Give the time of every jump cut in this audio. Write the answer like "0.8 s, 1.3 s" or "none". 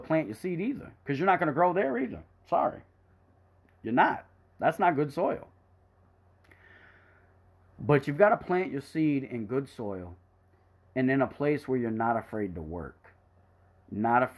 none